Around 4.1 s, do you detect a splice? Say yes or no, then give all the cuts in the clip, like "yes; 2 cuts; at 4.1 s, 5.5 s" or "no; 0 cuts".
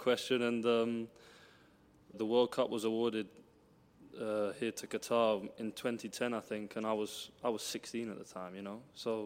no; 1 cut; at 2.1 s